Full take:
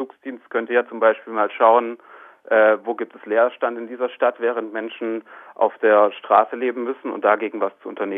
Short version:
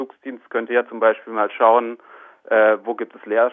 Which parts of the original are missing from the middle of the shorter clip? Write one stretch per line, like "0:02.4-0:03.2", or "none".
none